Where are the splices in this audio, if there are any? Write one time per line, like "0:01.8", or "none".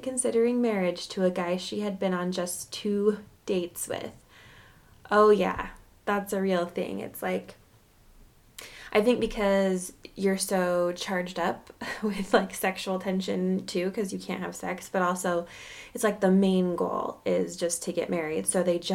none